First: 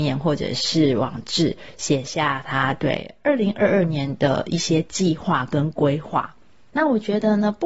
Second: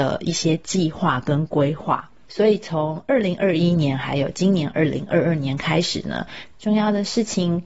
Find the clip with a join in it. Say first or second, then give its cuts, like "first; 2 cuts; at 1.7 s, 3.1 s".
second; 2 cuts; at 2.2 s, 6.6 s